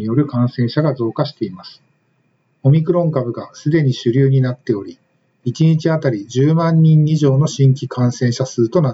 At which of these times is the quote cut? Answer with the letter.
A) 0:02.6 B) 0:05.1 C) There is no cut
C